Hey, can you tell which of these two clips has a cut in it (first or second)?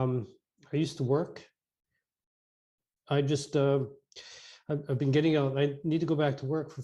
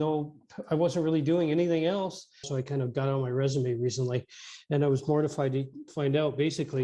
second